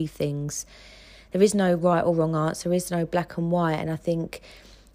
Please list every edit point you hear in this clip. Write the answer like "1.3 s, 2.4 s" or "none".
none